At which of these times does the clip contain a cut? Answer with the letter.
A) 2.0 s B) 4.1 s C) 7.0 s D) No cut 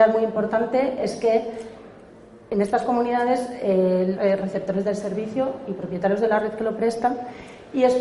B